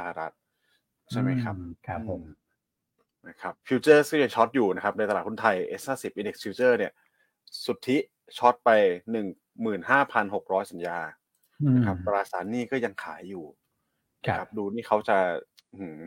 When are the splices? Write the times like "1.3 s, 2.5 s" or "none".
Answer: 1.8 s, 3.6 s